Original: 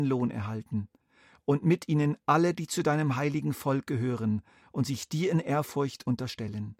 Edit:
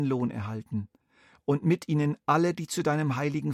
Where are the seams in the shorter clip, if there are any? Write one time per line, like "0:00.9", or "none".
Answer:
none